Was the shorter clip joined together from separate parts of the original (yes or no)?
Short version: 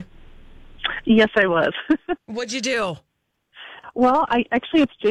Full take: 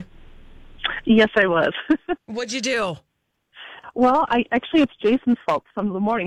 no